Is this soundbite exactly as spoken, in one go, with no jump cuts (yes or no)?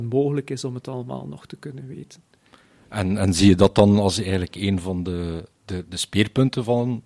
yes